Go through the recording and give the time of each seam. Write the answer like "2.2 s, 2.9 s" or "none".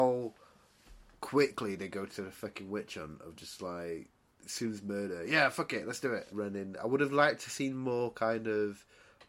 6.3 s